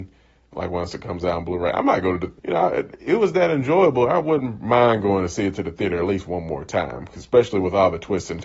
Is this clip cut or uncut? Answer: cut